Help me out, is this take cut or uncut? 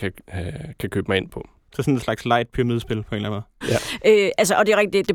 cut